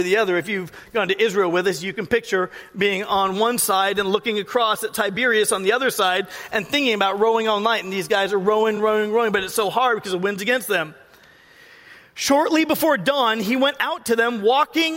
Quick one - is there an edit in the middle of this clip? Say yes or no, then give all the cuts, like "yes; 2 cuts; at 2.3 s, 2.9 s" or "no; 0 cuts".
no; 0 cuts